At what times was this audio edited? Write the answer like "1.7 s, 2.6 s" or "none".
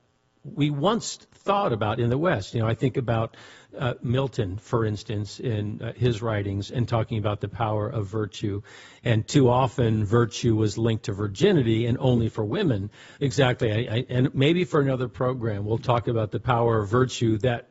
13.1 s